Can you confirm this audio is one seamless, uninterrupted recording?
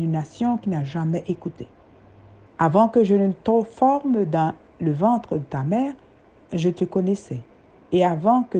no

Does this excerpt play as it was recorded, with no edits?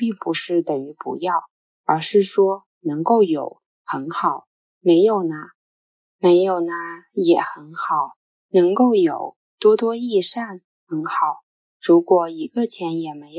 yes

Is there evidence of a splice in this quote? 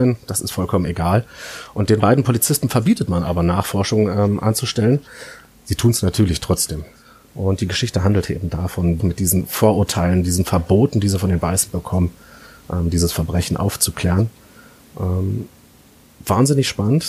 yes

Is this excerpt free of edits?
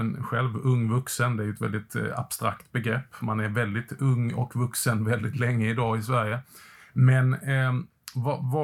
yes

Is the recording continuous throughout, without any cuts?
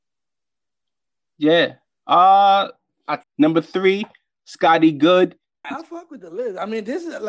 no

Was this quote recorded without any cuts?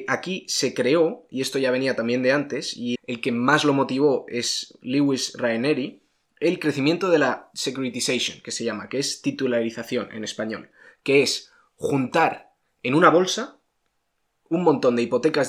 no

